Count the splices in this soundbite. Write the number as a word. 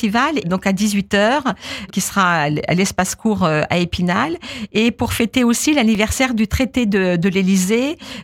one